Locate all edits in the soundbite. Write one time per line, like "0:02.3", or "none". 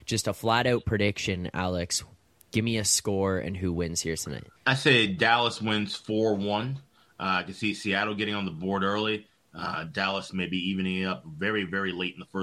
0:04.6